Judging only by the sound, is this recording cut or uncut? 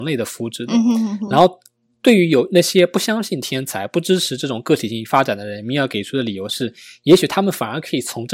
uncut